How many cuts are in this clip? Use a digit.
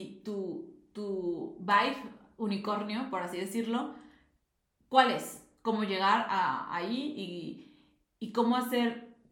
0